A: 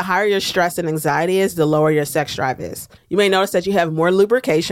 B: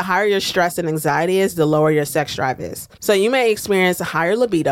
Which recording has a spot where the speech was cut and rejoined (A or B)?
A